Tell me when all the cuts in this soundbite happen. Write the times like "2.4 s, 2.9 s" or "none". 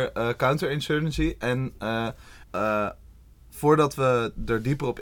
2.4 s